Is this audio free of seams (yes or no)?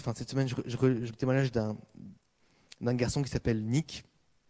no